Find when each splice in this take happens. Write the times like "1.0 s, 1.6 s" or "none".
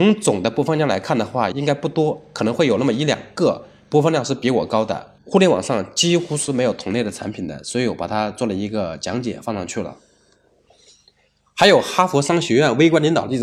1.5 s, 5.2 s